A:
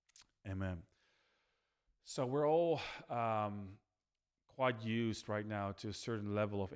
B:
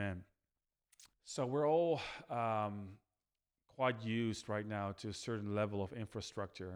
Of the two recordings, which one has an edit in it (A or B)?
B